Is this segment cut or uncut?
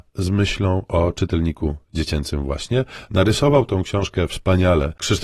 uncut